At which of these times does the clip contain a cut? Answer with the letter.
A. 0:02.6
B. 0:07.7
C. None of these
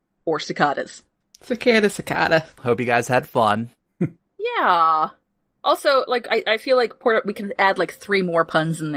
A